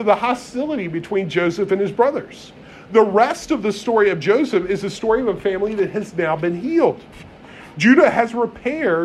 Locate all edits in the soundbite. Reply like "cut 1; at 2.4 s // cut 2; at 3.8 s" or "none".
none